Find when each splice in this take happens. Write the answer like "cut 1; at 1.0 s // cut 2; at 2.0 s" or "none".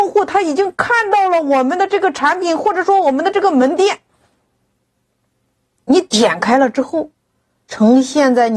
none